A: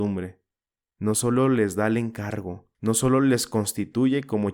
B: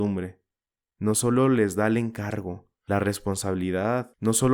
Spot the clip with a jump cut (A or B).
A